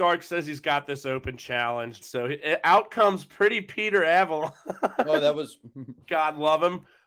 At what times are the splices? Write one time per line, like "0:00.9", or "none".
0:02.0